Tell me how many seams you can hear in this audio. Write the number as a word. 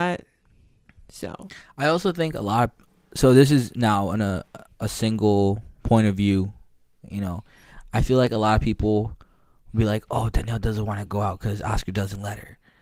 zero